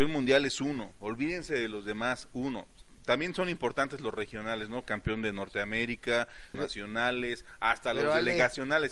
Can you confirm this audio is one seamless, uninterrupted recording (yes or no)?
no